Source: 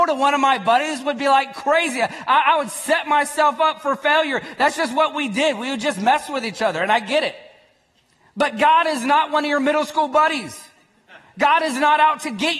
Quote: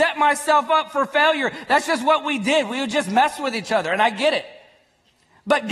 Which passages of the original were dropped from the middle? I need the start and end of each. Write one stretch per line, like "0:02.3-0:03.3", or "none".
none